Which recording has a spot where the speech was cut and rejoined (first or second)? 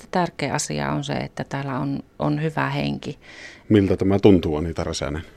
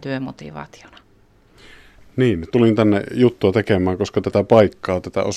first